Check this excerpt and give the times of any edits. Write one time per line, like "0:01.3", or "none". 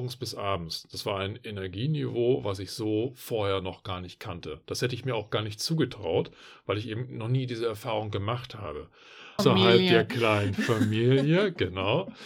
0:09.4